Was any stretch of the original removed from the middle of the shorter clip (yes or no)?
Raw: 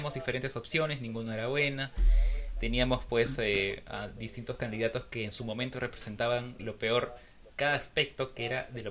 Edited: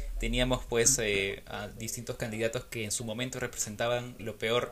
no